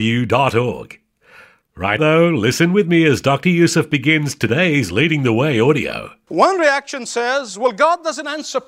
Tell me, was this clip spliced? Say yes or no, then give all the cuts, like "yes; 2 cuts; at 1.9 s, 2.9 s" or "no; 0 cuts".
yes; 2 cuts; at 2.0 s, 6.3 s